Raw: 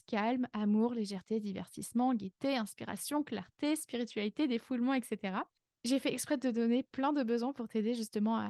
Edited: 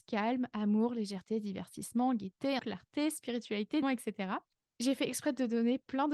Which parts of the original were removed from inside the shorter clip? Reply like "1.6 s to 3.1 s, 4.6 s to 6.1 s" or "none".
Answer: 2.6 s to 3.2 s, 4.5 s to 4.9 s